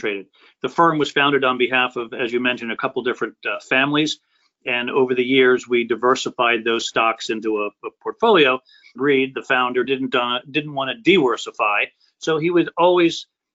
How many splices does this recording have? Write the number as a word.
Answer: one